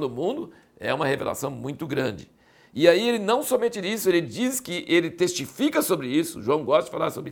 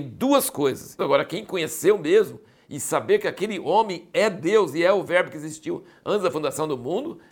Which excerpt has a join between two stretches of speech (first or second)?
second